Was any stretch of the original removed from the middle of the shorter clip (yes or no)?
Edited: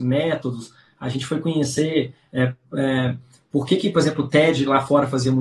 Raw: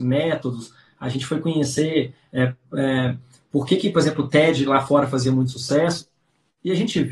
no